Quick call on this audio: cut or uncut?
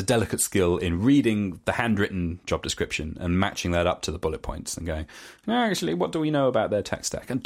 uncut